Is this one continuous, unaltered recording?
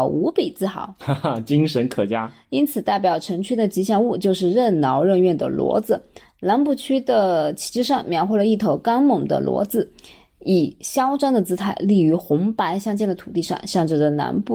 yes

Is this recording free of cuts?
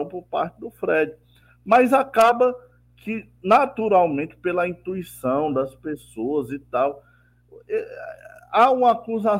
yes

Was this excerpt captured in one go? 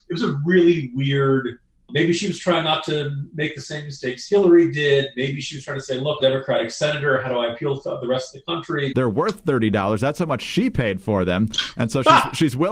no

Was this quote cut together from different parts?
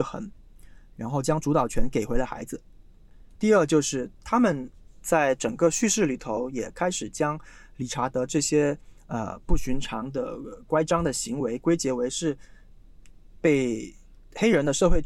yes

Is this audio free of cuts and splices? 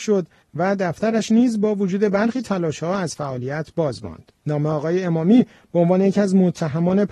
no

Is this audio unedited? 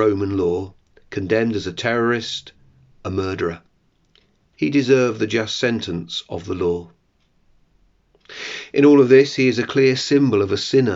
no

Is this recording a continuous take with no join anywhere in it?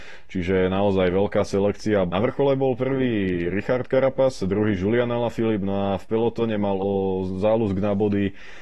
no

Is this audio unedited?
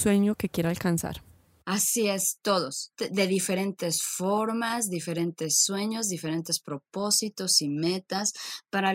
yes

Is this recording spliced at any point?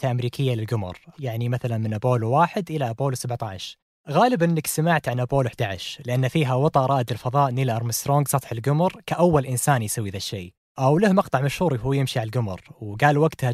yes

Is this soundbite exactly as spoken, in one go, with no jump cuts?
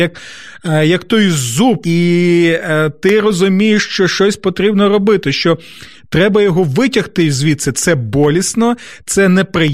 no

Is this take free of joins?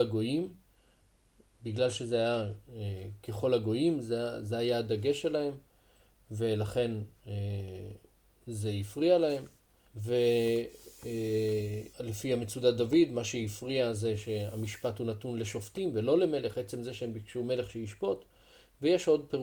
no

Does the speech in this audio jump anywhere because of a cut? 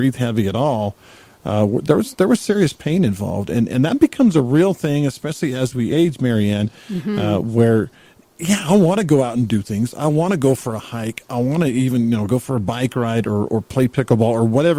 no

